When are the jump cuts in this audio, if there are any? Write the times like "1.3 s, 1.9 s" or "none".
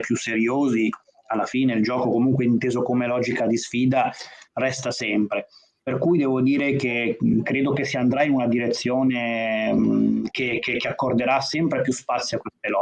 5.8 s